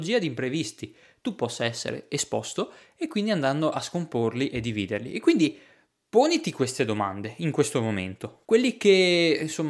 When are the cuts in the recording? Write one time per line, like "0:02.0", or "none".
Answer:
0:08.5